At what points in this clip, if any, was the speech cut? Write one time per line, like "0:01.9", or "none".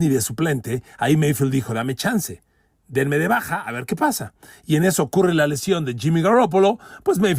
none